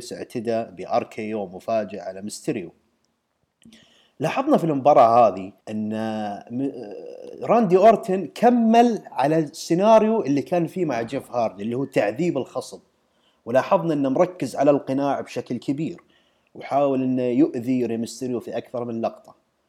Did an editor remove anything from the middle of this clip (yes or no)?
yes